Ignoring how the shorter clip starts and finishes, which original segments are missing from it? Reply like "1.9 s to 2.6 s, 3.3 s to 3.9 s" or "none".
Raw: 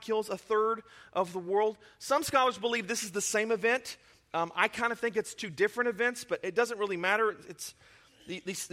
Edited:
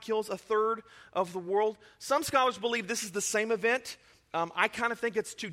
none